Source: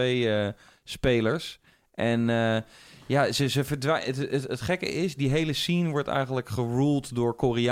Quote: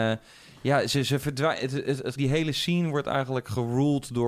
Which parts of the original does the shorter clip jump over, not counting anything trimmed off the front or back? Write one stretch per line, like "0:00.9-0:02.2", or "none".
0:04.6-0:05.2

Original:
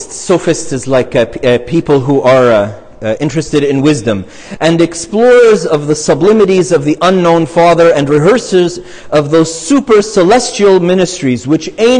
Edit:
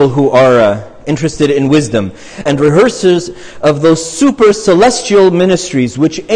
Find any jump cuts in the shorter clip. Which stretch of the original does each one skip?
0:03.0-0:03.2
0:04.6-0:07.9

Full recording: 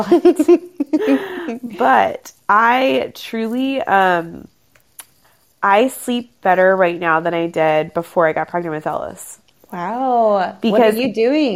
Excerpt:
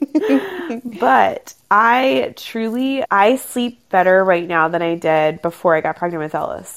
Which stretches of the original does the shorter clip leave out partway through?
0:03.8-0:05.6

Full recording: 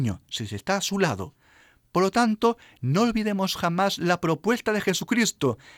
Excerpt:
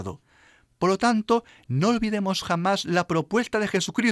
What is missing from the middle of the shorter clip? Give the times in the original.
none

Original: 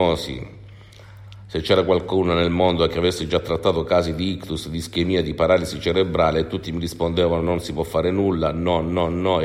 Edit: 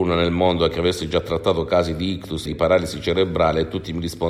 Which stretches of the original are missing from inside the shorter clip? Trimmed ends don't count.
0:04.6-0:05.2

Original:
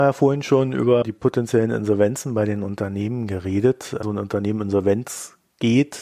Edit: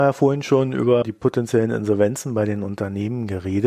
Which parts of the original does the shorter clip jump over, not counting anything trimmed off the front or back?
none

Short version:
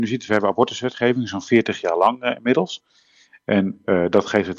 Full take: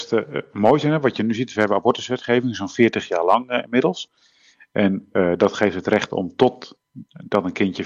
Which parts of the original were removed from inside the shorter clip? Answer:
none

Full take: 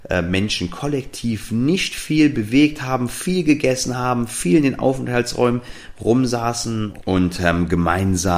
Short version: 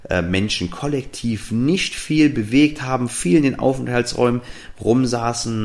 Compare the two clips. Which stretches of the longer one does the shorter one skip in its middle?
0:03.1-0:04.3

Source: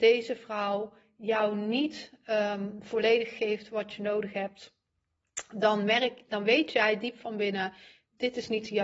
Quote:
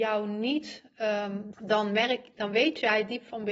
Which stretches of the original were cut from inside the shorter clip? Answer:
0:02.8-0:05.5

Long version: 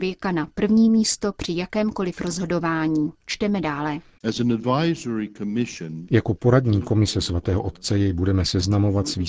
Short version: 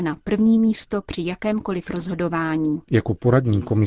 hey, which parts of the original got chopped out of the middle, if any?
0:03.2-0:06.1

